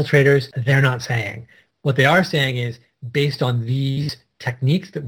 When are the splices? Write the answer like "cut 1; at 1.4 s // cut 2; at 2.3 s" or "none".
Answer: none